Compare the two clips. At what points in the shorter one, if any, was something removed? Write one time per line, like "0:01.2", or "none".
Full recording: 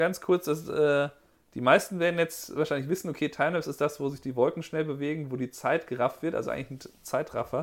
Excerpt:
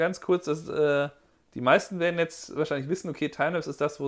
none